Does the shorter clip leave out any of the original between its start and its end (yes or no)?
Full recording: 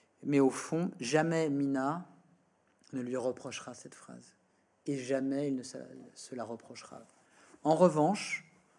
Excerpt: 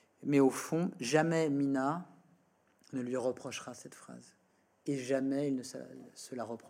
no